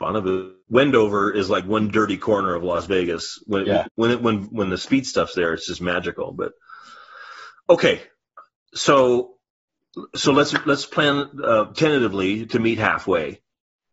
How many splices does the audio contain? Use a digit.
1